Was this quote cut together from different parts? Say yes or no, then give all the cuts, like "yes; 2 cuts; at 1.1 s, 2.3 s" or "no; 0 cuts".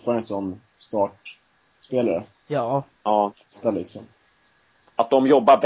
no; 0 cuts